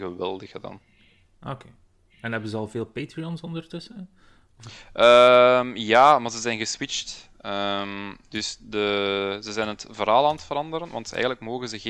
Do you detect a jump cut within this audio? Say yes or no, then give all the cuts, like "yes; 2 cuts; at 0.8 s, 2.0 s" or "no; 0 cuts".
no; 0 cuts